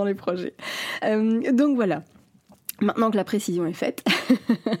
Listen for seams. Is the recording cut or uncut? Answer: uncut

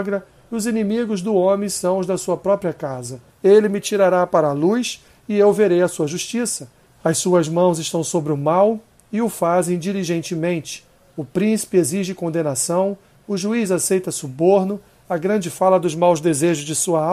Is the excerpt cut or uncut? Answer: cut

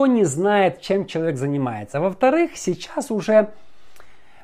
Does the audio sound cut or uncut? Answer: uncut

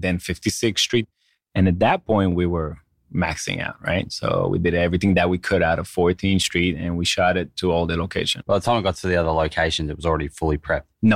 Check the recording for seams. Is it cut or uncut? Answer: uncut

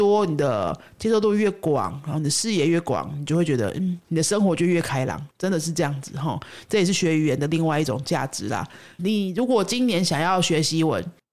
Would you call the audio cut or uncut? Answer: cut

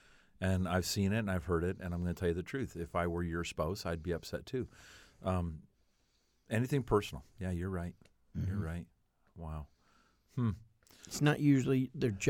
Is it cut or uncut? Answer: uncut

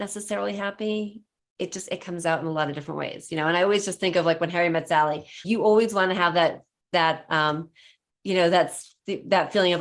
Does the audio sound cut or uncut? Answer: cut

